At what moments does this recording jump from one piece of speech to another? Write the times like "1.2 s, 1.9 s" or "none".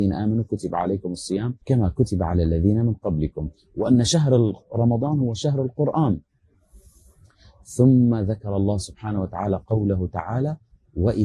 1.6 s